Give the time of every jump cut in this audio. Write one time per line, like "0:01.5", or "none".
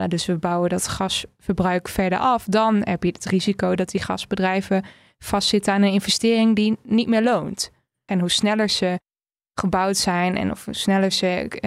0:08.1

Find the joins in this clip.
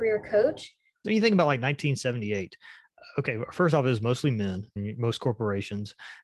0:01.0
0:04.8

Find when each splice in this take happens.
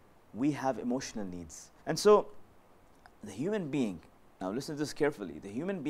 0:01.8

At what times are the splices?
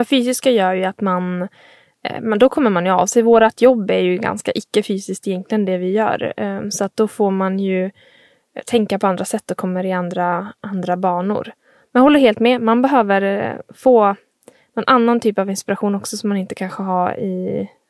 none

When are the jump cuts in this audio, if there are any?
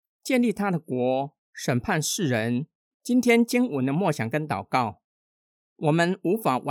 0:02.9

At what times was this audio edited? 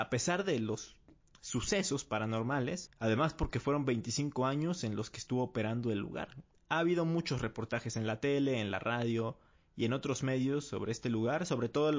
0:02.9
0:06.5

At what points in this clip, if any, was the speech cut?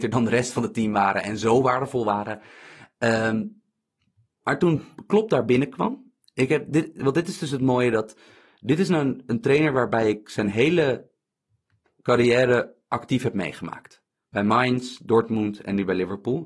none

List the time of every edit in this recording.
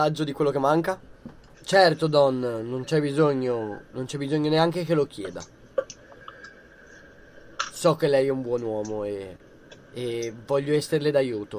0:01.5

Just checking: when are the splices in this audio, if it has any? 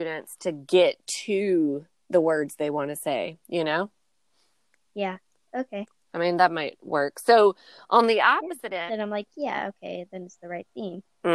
0:08.9

